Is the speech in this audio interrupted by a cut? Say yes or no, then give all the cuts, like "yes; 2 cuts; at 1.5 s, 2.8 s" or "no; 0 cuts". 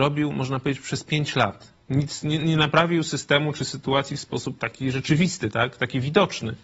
no; 0 cuts